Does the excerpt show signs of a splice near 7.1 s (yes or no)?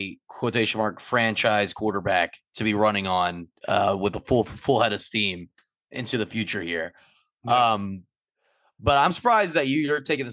no